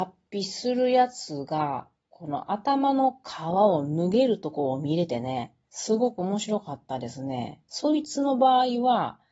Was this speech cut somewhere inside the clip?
no; 0 cuts

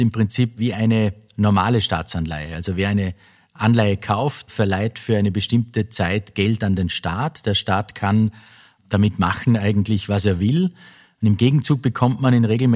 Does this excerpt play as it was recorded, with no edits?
yes; 0 cuts

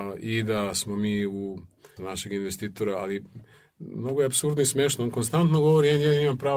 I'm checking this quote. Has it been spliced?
yes; 1 cut; at 2.0 s

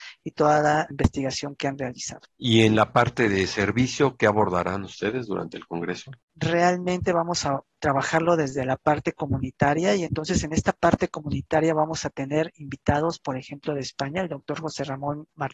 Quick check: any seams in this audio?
no; 0 cuts

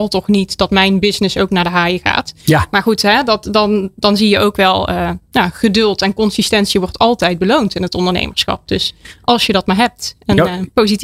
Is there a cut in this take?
no; 0 cuts

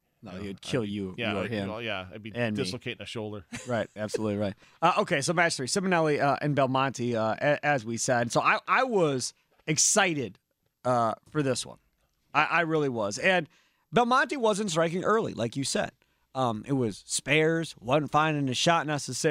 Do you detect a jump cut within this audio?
no; 0 cuts

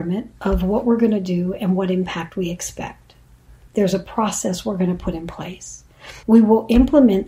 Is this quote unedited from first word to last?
no; 2 cuts; at 3.7 s, 6.2 s

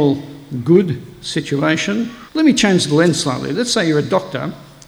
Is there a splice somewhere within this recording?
yes; 1 cut; at 2.3 s

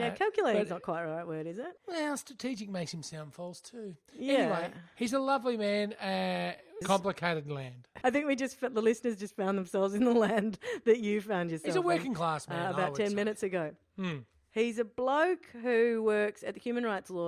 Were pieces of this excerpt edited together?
yes; 3 cuts; at 1.8 s, 6.8 s, 8.0 s

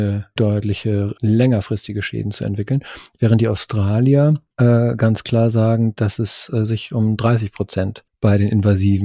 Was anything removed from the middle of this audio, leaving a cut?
yes; 1 cut; at 1.1 s

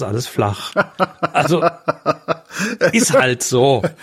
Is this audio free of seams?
yes; 0 cuts

